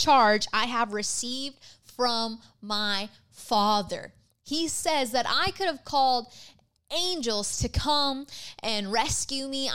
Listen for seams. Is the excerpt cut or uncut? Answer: uncut